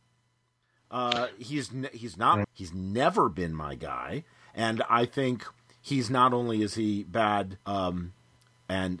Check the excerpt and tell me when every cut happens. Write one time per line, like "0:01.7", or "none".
0:02.4
0:07.6